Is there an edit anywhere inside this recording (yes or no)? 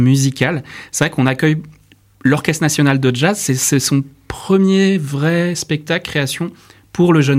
no